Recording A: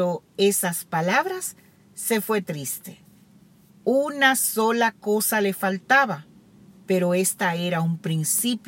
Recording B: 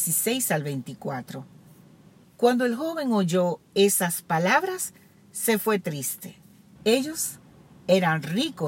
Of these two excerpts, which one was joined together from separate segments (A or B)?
B